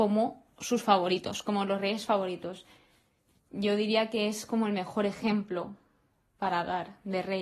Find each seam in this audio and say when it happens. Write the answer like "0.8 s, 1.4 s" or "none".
none